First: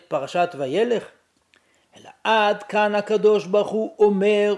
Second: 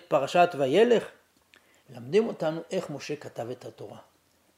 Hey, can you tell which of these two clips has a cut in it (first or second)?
second